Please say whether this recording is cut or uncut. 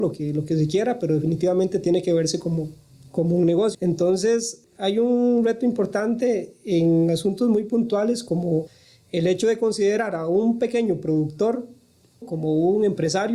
cut